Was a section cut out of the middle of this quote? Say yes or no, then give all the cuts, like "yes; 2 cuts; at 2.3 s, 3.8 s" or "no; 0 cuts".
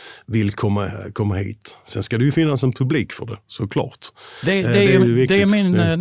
no; 0 cuts